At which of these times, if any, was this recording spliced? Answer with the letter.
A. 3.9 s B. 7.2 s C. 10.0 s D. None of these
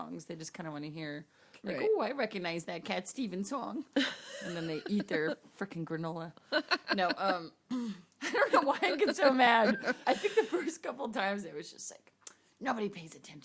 C